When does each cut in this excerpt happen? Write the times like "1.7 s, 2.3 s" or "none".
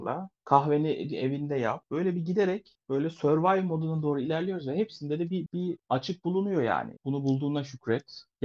5.5 s, 7.0 s